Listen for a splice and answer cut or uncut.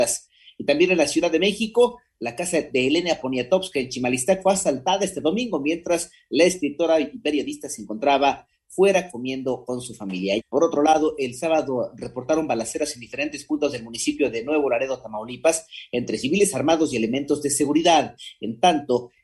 cut